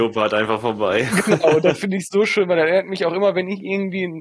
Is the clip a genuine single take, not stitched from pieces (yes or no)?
yes